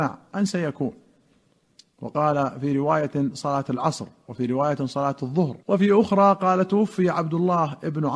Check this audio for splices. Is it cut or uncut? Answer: cut